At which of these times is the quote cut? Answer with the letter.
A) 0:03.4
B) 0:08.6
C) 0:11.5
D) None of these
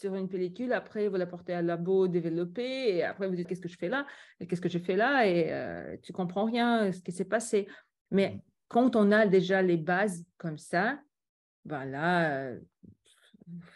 A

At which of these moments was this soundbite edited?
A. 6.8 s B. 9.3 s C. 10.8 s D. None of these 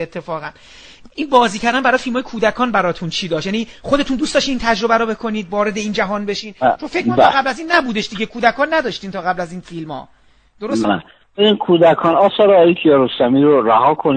C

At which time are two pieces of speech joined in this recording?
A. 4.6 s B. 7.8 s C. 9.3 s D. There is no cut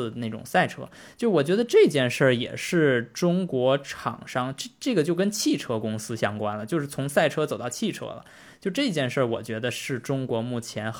D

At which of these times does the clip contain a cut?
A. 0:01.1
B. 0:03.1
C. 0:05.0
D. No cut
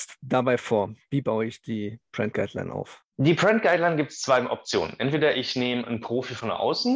B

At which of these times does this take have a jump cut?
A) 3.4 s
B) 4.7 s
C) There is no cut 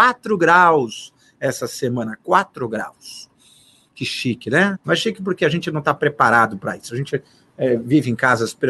B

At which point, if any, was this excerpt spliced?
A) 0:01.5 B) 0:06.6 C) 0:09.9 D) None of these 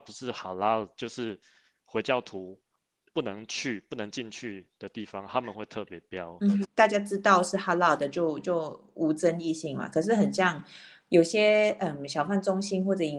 B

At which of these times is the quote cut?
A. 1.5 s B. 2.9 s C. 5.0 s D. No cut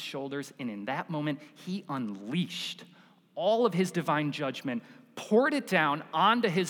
D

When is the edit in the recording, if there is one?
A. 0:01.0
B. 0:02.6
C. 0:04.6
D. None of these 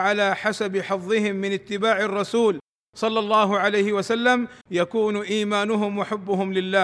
C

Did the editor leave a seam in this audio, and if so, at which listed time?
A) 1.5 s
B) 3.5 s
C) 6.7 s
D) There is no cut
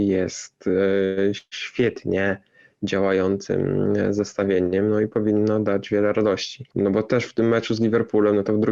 C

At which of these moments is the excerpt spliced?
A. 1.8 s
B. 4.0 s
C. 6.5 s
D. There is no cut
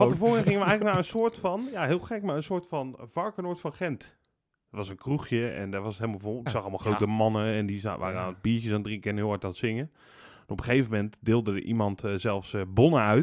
C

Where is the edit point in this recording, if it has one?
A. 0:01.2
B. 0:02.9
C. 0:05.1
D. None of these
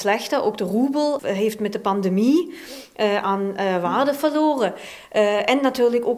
A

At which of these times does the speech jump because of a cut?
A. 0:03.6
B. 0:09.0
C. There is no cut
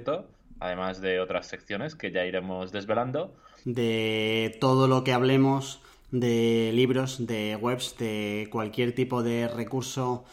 A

